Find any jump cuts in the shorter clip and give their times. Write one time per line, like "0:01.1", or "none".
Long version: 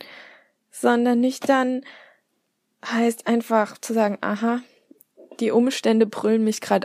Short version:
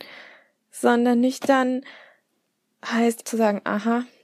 0:03.2

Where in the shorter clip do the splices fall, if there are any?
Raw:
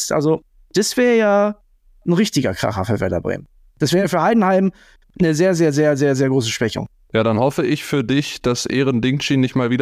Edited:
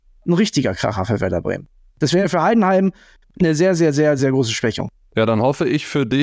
0:04.2

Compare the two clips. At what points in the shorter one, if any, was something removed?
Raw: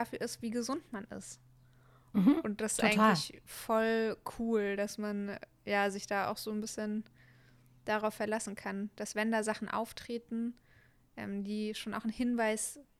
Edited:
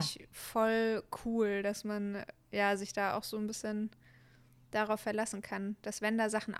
none

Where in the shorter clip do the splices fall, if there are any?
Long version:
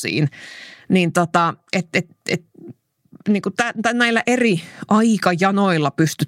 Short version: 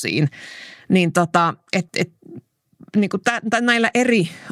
0:01.9

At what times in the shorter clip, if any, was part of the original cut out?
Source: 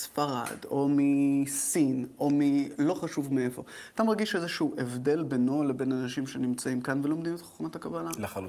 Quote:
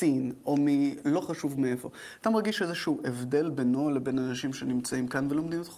none

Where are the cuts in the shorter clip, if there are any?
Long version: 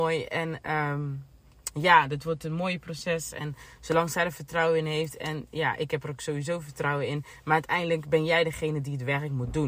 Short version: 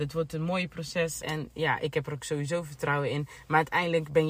0:01.2

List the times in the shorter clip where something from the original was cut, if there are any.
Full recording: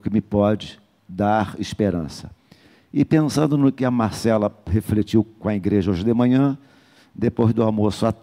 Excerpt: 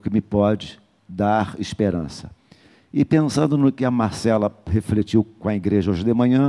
none

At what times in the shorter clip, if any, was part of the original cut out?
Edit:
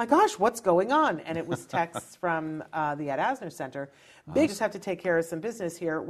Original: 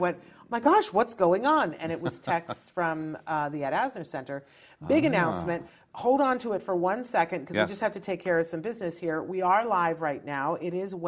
0:04.5

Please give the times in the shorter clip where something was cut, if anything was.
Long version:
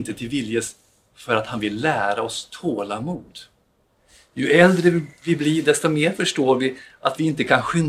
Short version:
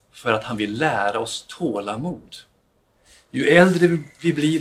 none

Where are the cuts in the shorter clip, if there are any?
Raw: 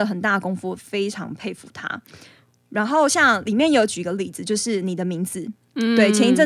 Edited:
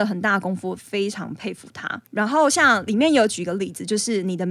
0:02.1

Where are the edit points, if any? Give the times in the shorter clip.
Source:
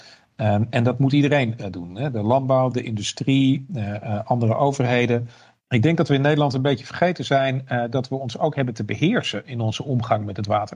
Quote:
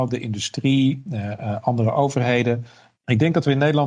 none

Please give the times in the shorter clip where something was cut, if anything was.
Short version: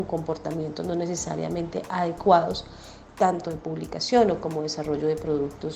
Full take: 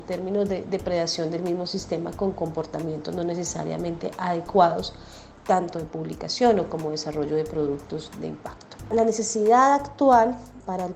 none

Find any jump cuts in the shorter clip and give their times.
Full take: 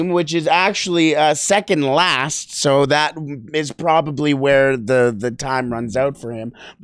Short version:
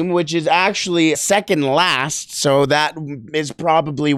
0:01.1

